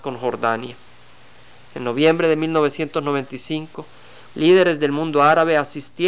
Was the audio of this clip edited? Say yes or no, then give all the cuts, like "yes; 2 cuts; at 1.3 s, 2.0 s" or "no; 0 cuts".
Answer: yes; 1 cut; at 4.3 s